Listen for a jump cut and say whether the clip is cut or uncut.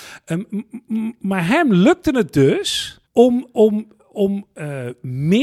cut